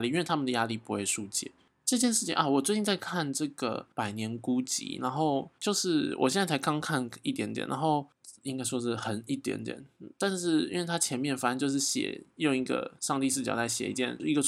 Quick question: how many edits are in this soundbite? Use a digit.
1